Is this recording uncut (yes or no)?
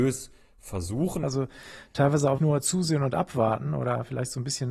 no